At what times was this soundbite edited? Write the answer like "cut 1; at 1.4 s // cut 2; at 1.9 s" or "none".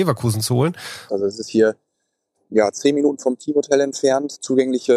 cut 1; at 1.1 s